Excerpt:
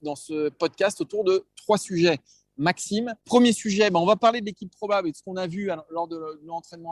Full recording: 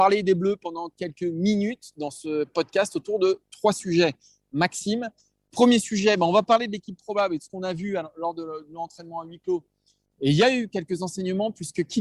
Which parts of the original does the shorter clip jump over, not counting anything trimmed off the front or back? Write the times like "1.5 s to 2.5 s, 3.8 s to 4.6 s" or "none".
5.1 s to 5.4 s